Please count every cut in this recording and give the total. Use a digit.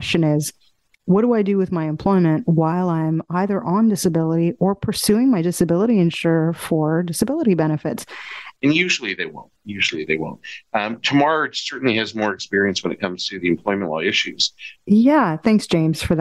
2